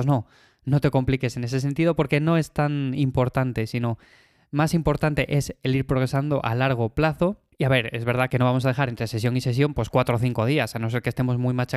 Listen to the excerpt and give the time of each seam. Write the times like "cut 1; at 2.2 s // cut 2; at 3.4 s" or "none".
none